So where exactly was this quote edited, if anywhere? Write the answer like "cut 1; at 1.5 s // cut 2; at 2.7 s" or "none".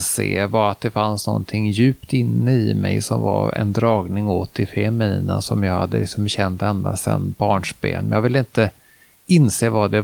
none

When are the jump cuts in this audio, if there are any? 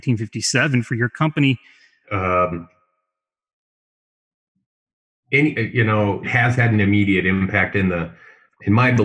cut 1; at 2.0 s // cut 2; at 6.2 s

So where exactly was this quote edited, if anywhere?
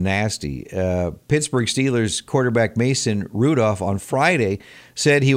none

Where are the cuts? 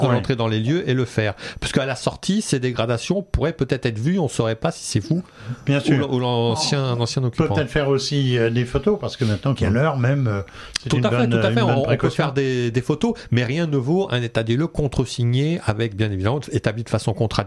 cut 1; at 9.6 s

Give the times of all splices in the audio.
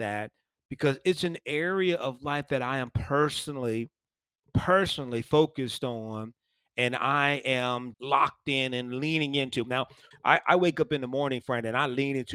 cut 1; at 7.9 s // cut 2; at 10.1 s

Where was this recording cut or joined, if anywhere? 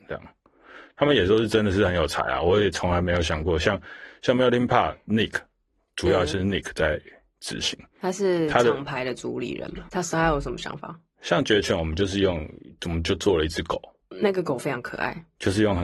cut 1; at 9.9 s

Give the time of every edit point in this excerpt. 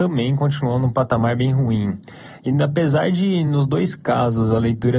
none

